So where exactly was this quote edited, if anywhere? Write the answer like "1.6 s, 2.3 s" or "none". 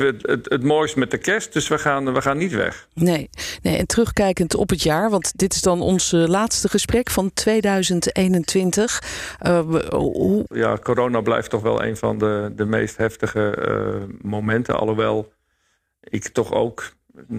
10.5 s